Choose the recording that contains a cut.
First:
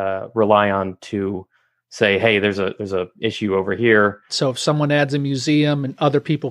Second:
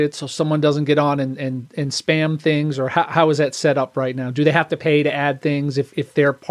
first; 1 cut; at 4.3 s

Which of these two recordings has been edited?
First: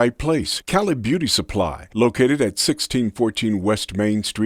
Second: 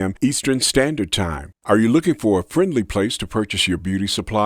second; 1 cut; at 1.5 s

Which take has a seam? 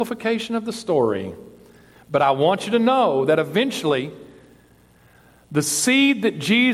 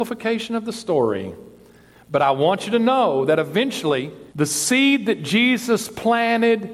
second; 1 cut; at 4.3 s

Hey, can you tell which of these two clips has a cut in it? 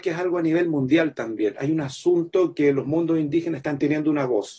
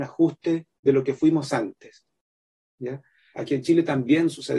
second; 1 cut; at 3.3 s

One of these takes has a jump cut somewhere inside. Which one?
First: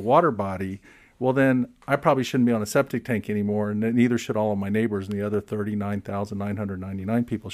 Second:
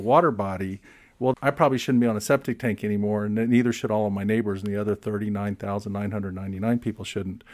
second; 1 cut; at 1.3 s

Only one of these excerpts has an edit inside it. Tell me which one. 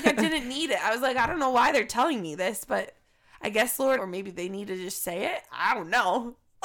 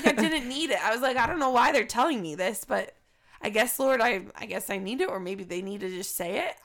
first; 1 cut; at 4.0 s

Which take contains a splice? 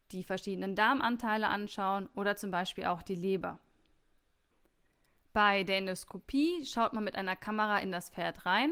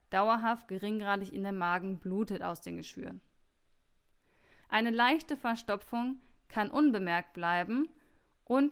second; 1 cut; at 4.6 s

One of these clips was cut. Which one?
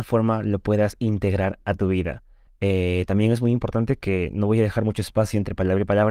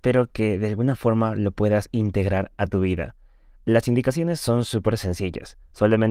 first; 1 cut; at 2.5 s

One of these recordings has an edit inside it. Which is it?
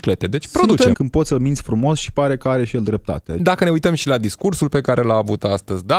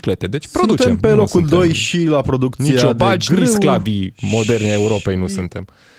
first; 2 cuts; at 0.9 s, 3.4 s

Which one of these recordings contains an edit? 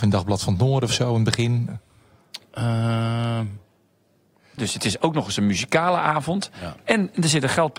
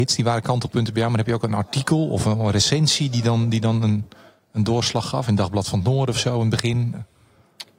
first; 1 cut; at 4.6 s

